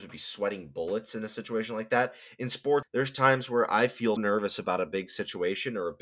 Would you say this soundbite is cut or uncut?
cut